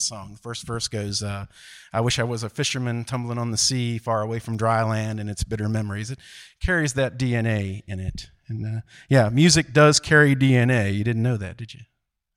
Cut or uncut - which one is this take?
uncut